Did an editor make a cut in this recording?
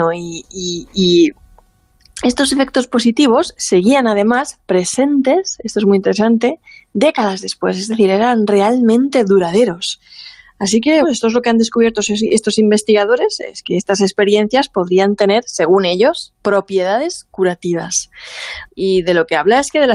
yes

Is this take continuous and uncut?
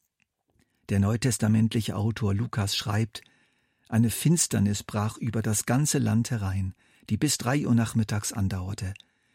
yes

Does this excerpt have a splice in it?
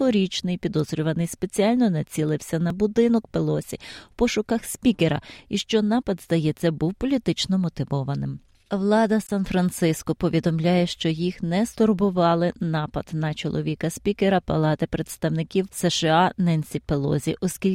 yes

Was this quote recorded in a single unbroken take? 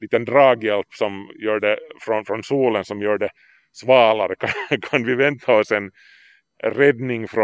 yes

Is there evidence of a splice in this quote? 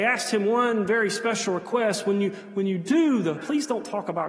yes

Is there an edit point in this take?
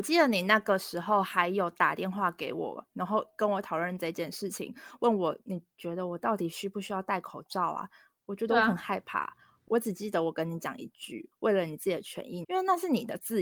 yes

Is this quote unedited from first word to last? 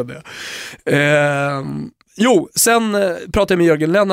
yes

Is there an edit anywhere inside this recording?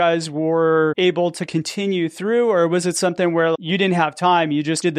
no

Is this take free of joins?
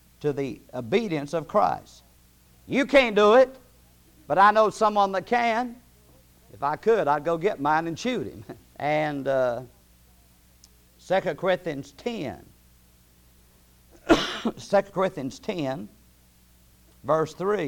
no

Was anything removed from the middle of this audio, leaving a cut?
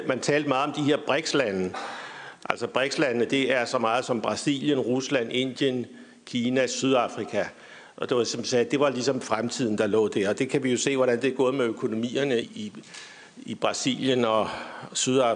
yes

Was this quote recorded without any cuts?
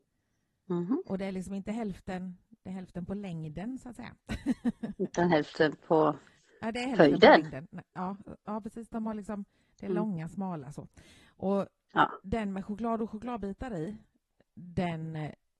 yes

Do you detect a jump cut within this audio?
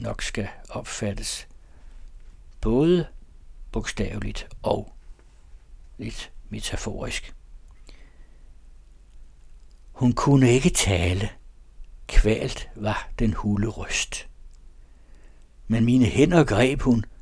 no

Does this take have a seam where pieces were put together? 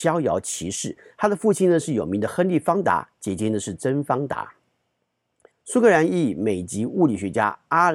yes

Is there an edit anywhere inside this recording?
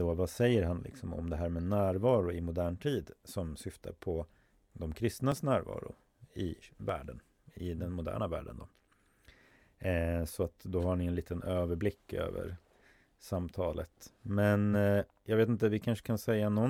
no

